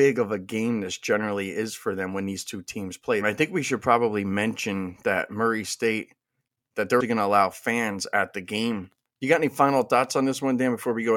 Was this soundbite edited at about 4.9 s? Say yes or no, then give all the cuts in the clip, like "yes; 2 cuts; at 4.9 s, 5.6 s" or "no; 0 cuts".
no; 3 cuts; at 3.2 s, 7.0 s, 9.1 s